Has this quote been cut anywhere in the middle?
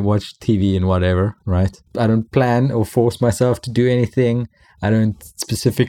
no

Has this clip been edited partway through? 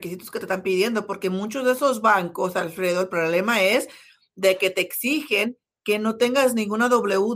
no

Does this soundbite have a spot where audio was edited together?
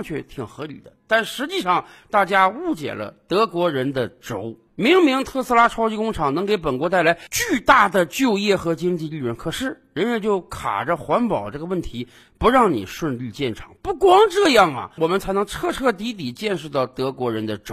yes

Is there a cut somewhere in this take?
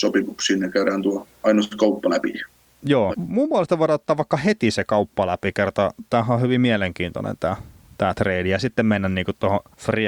yes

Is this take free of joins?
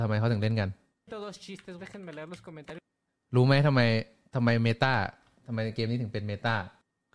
no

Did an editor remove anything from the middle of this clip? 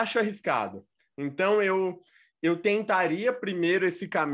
no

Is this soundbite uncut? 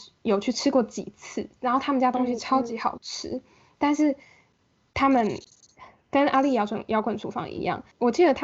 yes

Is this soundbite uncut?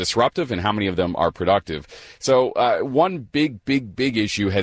yes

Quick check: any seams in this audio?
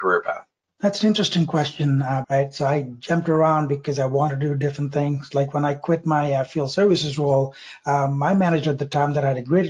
yes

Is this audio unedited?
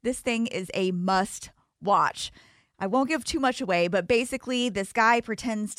yes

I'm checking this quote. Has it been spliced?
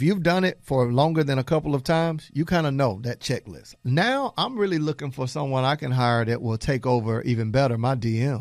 yes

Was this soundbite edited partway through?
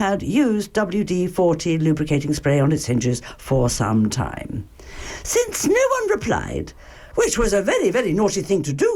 yes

